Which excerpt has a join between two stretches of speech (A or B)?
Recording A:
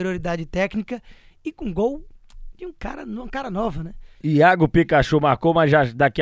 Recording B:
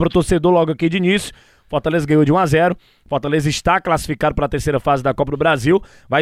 A